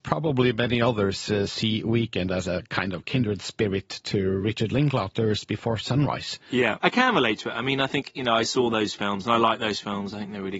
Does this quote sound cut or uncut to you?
cut